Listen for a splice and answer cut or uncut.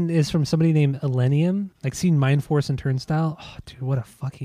cut